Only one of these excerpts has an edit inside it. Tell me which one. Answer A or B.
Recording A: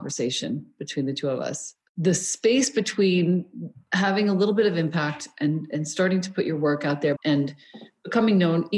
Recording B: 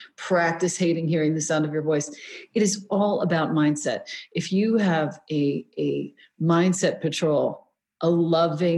A